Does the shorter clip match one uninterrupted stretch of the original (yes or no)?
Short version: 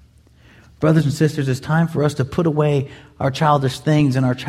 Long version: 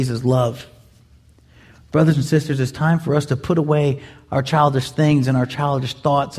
yes